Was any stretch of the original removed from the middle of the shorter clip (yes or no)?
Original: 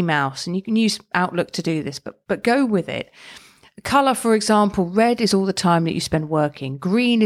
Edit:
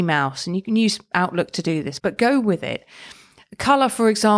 yes